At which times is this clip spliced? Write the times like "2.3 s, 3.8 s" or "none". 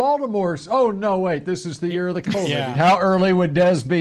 2.7 s